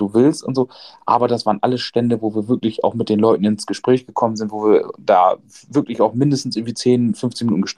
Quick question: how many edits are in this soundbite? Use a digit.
0